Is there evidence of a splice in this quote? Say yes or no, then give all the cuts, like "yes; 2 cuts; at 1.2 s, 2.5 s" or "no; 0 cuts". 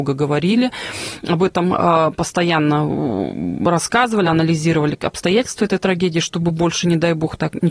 no; 0 cuts